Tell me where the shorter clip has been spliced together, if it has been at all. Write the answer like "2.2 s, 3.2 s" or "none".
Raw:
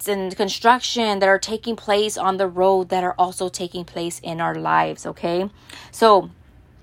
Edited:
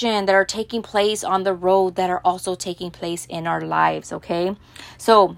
none